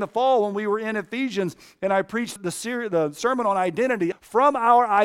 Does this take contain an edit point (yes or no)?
yes